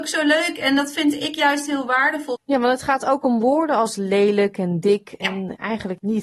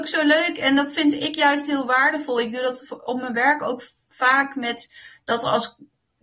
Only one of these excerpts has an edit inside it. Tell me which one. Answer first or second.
first